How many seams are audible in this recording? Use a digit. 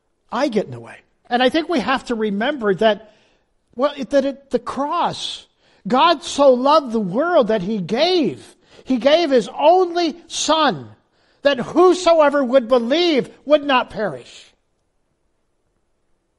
1